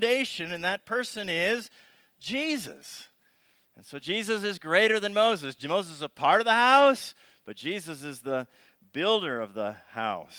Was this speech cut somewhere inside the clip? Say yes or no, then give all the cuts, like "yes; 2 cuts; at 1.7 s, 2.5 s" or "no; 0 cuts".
no; 0 cuts